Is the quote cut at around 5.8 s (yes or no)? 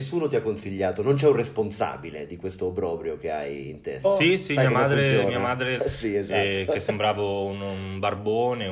yes